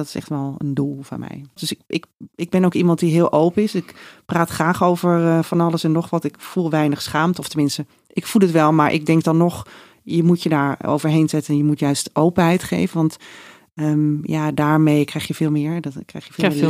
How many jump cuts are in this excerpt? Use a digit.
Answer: 1